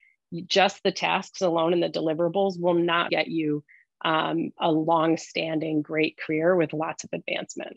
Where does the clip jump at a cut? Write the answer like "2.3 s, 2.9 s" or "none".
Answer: 3.1 s